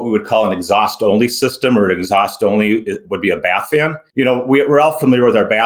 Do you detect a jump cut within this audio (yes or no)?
yes